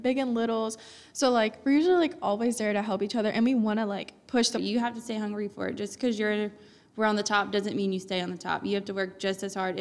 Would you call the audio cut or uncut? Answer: cut